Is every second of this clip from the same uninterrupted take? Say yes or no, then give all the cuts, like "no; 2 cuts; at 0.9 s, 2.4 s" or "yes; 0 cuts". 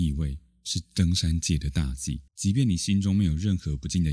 no; 1 cut; at 2.3 s